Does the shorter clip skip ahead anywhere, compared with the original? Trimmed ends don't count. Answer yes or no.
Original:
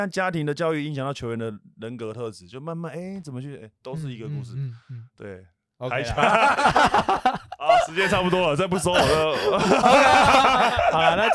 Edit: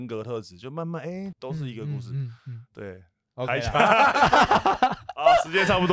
yes